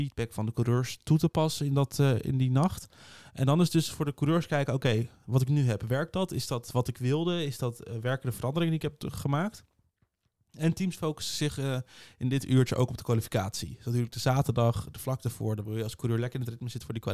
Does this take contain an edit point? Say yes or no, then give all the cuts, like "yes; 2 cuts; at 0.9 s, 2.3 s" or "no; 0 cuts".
no; 0 cuts